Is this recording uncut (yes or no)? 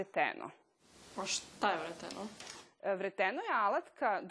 yes